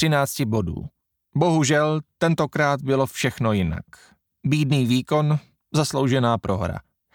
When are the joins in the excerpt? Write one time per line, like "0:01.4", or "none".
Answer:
0:01.2